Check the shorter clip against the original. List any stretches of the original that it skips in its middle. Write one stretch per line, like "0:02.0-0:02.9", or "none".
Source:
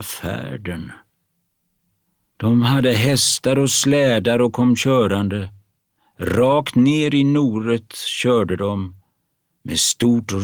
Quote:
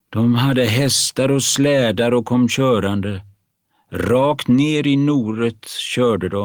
none